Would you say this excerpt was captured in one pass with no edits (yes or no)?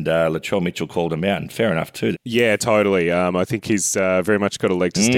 no